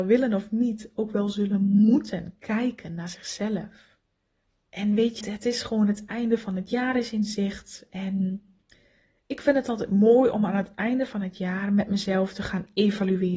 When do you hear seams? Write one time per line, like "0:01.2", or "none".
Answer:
0:05.2